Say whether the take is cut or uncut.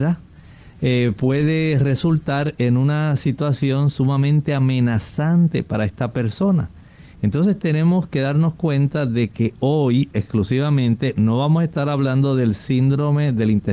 uncut